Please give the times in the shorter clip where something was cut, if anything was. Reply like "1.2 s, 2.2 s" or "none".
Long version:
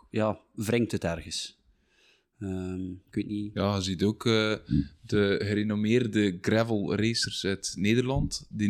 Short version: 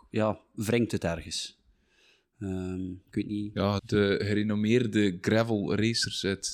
3.8 s